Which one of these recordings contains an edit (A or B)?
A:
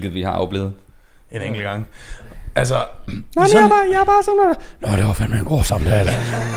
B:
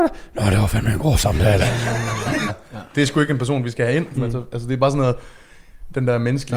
B